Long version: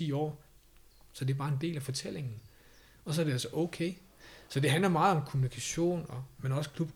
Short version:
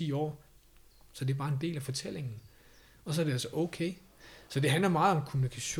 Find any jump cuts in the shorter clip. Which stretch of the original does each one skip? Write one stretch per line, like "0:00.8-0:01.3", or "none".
none